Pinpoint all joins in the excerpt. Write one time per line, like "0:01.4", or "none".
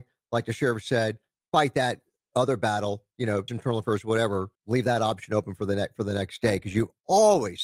0:03.5
0:04.6